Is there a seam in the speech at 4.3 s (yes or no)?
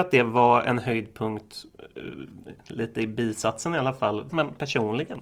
yes